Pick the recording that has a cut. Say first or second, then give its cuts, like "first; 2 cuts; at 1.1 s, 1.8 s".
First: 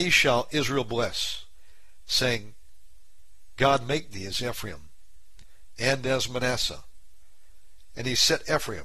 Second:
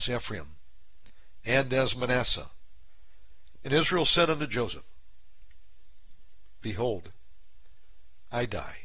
second; 1 cut; at 3.6 s